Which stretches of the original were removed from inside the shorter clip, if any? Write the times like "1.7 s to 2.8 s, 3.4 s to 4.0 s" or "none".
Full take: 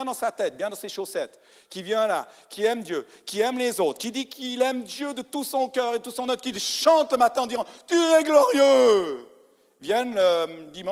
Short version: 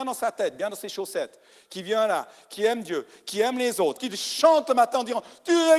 4.0 s to 6.4 s